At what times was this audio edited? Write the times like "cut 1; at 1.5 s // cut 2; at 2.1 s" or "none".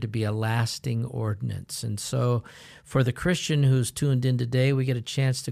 none